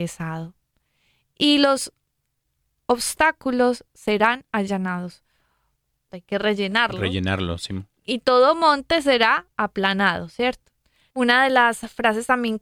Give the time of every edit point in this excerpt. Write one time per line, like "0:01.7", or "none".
0:06.1
0:11.1